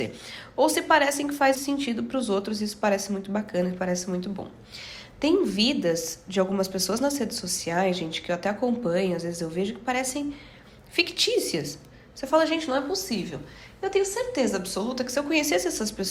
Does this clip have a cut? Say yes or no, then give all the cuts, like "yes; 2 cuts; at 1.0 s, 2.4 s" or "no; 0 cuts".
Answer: yes; 1 cut; at 1.5 s